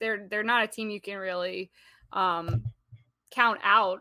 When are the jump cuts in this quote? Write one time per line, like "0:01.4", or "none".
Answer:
none

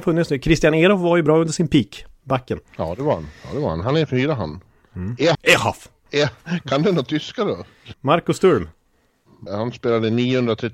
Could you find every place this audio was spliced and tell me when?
0:05.3
0:07.9
0:09.5

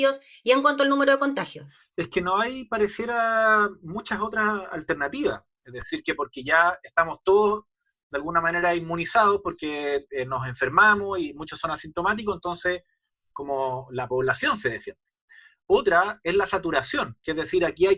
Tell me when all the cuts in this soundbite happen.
0:05.6

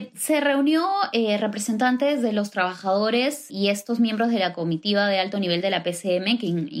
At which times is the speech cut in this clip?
0:03.5

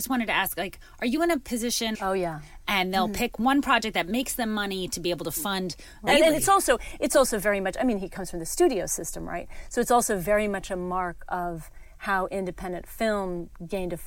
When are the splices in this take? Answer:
0:01.9
0:06.1

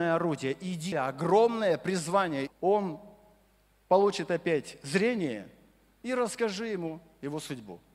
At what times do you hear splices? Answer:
0:00.9
0:02.5

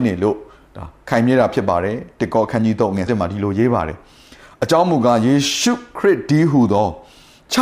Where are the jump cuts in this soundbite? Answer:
0:03.1

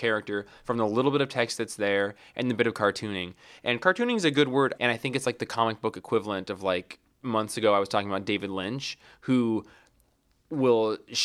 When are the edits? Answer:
0:04.8

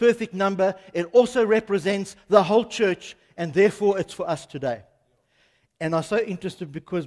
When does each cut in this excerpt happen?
none

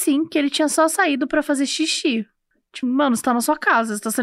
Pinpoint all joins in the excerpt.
0:02.8

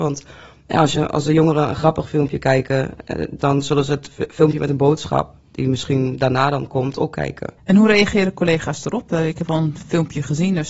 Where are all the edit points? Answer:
0:03.4

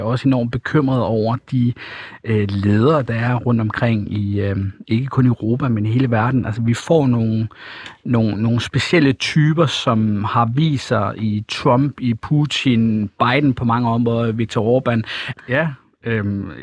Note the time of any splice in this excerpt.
0:15.3

